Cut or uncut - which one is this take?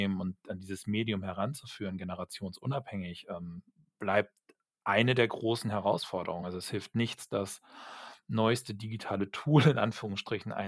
uncut